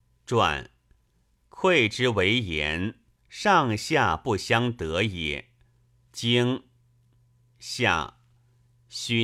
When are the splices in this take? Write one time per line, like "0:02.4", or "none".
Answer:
0:06.1